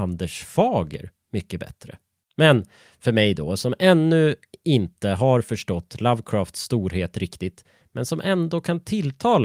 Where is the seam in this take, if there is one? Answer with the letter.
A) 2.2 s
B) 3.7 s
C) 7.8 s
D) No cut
A